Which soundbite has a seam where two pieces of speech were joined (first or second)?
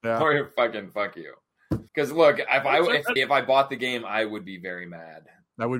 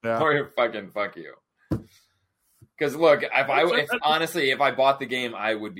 first